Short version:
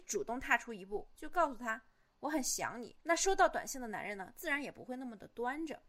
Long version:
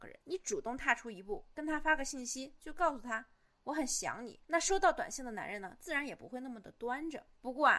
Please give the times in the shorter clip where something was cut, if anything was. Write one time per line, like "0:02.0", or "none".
0:01.1